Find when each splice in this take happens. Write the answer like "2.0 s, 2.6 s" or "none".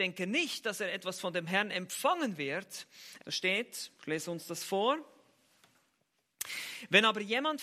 3.2 s